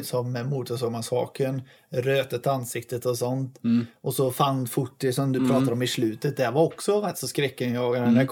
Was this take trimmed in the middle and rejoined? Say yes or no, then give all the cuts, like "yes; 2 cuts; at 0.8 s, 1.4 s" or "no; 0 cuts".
no; 0 cuts